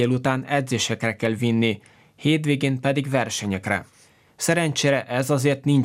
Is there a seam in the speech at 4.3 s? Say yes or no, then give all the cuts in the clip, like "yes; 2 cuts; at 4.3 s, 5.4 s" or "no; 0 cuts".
yes; 1 cut; at 4.3 s